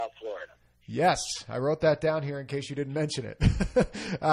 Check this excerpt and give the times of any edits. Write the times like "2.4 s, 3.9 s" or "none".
none